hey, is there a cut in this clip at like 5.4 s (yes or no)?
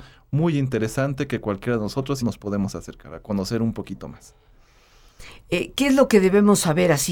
no